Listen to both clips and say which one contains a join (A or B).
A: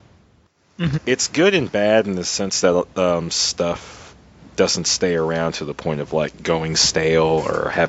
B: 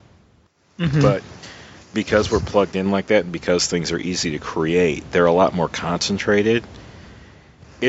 A